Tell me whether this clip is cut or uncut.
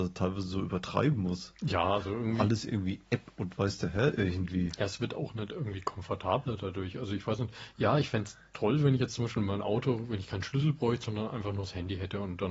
uncut